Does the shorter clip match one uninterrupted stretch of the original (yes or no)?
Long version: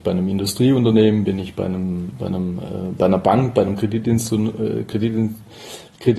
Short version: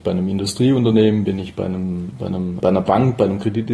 no